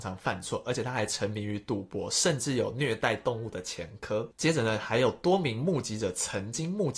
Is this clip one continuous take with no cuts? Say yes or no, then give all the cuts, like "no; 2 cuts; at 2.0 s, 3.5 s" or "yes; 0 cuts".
no; 1 cut; at 4.3 s